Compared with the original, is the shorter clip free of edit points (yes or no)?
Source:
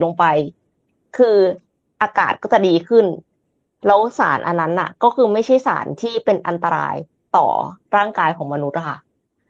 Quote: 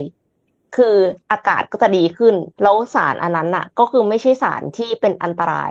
no